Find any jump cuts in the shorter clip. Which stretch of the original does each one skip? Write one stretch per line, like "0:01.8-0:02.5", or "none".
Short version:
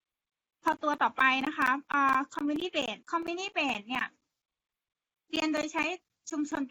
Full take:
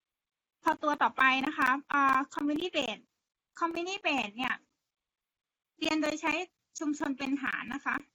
0:03.0-0:03.5